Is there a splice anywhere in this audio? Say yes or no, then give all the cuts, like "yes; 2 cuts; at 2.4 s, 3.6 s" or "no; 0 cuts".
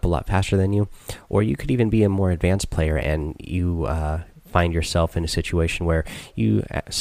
no; 0 cuts